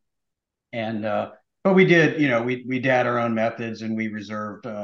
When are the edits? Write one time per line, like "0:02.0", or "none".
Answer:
none